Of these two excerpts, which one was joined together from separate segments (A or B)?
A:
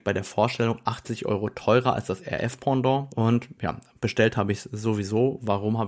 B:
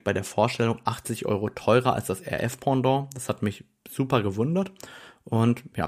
A